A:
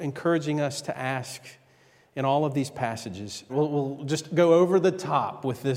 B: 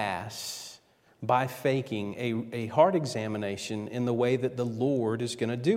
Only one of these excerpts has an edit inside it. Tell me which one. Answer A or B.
A